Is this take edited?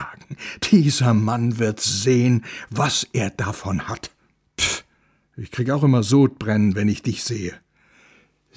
no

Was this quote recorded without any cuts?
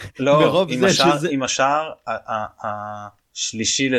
yes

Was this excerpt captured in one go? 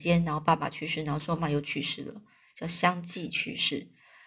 no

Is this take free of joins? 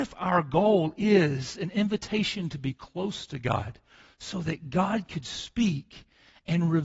yes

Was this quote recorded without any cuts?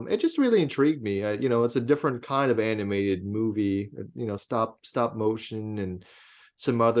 yes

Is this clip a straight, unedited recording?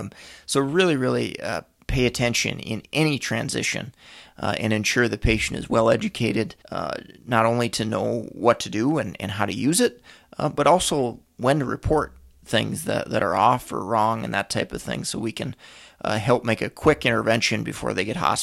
no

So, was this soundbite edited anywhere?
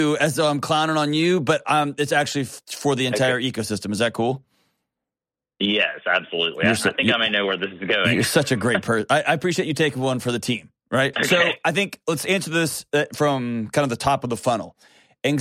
yes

